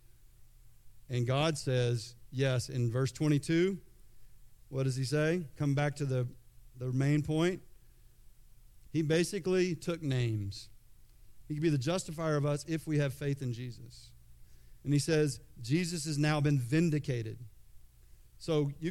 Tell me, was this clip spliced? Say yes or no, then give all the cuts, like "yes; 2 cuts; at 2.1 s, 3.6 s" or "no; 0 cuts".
yes; 2 cuts; at 8.9 s, 11.4 s